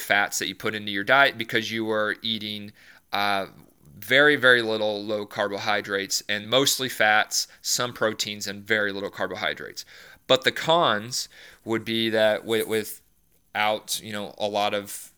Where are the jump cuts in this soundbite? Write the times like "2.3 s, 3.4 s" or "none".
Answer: 6.4 s